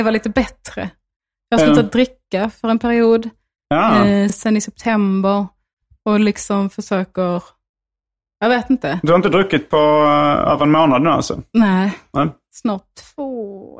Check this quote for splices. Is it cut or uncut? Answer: uncut